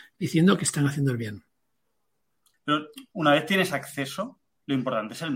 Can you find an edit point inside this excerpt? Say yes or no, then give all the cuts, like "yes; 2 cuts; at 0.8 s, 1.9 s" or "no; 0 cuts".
yes; 1 cut; at 2.5 s